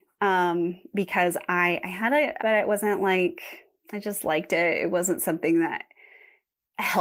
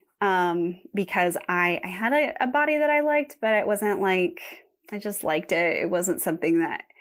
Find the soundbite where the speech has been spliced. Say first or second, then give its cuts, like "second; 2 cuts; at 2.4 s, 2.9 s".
first; 1 cut; at 2.4 s